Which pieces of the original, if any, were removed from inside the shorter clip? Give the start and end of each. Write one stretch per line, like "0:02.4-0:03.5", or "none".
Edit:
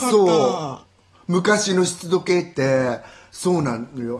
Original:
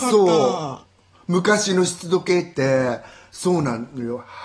none